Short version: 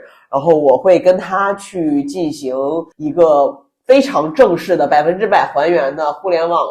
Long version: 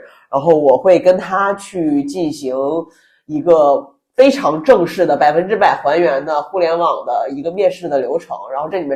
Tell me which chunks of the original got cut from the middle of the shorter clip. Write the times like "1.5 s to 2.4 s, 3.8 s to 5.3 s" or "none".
2.9 s to 3.2 s